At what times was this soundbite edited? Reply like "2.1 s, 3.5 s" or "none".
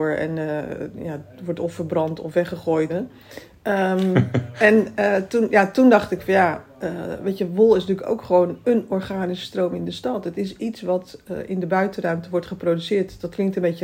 2.9 s